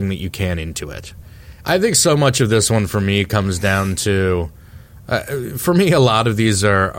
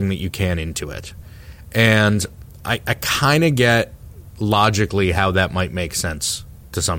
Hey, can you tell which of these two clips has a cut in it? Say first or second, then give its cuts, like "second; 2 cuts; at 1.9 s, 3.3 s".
first; 1 cut; at 1.6 s